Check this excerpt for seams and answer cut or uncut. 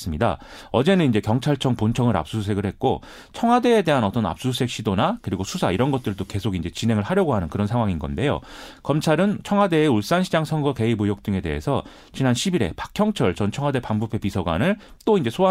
uncut